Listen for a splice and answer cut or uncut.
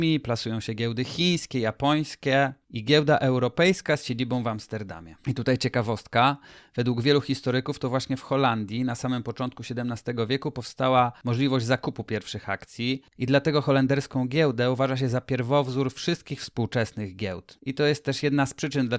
cut